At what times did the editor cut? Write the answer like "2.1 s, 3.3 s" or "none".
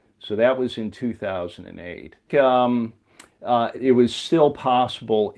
2.3 s, 3.7 s

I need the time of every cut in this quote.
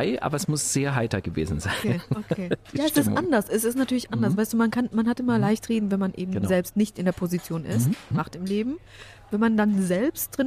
8.1 s

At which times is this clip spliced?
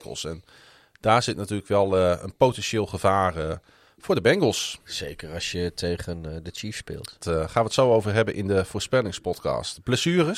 7.2 s

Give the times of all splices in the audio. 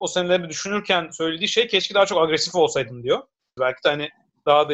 3.6 s

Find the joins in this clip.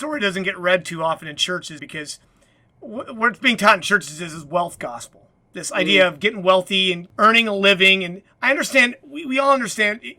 1.8 s

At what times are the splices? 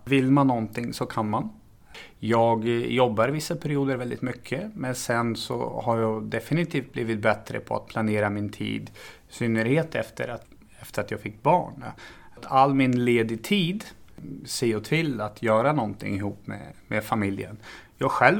none

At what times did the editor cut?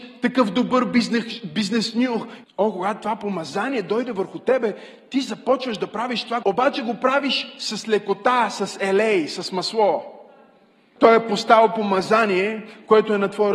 2.4 s, 6.4 s, 11.0 s

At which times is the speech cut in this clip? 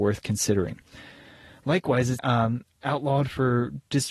2.2 s

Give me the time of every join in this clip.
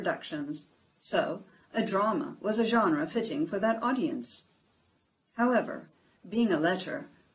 none

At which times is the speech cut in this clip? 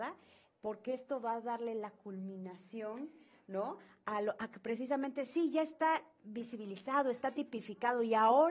none

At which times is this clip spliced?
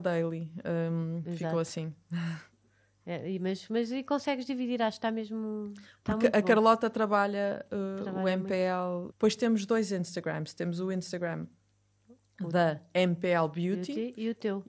9.1 s

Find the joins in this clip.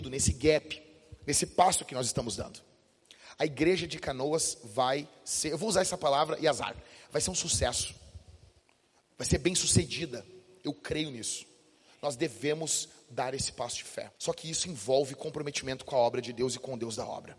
14.2 s

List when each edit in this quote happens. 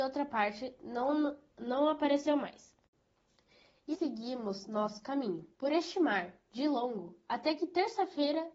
3.9 s, 5.5 s

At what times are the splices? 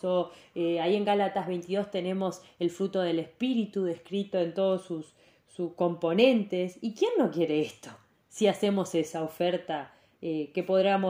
none

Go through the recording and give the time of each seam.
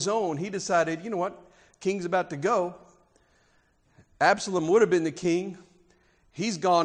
none

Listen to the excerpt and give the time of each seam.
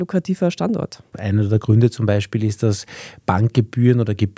1.1 s

